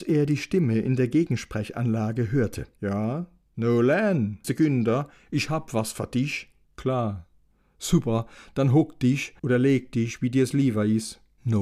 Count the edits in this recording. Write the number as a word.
three